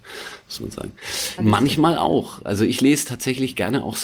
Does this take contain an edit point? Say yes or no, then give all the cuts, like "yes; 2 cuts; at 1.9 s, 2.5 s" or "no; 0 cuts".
yes; 1 cut; at 1.4 s